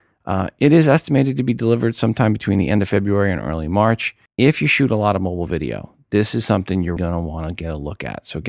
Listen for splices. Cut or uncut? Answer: cut